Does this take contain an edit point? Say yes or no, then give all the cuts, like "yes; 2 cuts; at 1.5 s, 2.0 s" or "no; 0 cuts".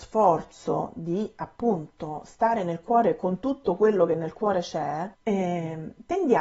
yes; 1 cut; at 5.1 s